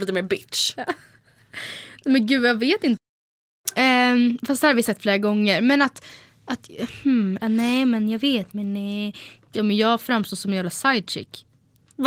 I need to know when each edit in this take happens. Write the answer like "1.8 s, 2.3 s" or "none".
7.4 s, 9.5 s

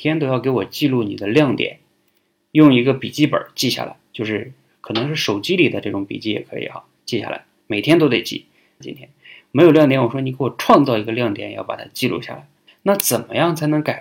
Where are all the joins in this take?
8.8 s, 12.7 s

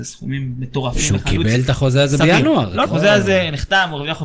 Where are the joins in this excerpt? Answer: 2.9 s

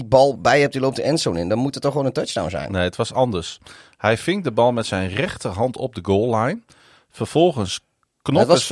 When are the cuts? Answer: none

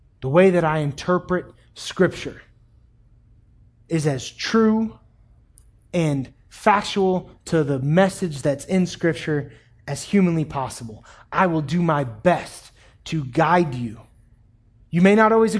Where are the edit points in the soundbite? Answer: none

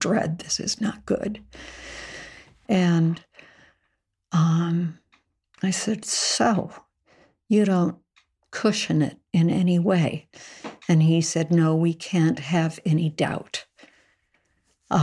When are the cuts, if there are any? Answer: 2.6 s

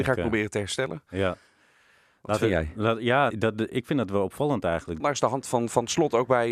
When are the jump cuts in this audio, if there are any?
3.3 s, 5.0 s

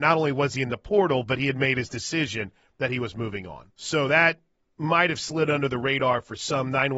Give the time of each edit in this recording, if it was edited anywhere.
3.7 s

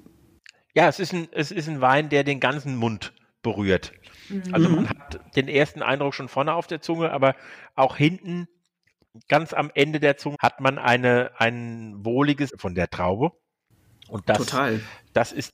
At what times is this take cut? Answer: 10.3 s, 12.5 s

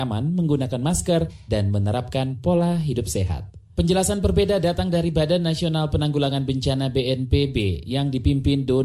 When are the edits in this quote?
1.5 s

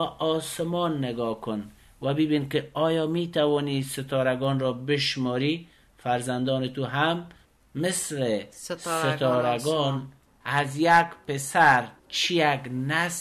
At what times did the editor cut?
10.3 s, 12.0 s

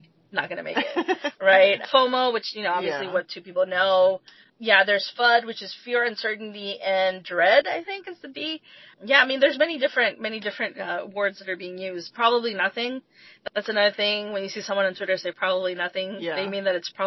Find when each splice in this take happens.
none

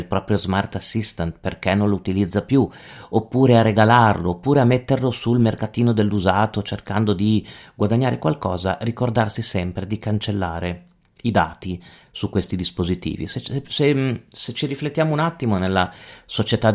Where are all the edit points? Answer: none

